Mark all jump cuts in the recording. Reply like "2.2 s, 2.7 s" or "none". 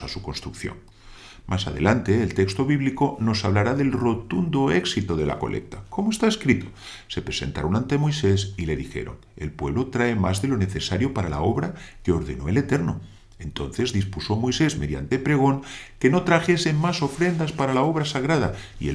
none